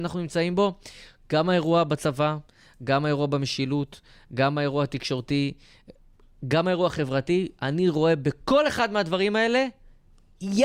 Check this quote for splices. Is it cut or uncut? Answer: uncut